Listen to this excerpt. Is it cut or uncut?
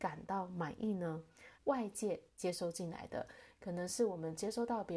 cut